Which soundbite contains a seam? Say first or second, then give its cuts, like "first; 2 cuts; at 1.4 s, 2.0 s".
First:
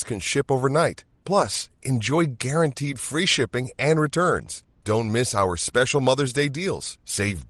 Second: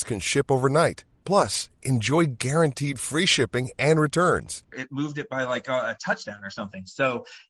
second; 1 cut; at 4.7 s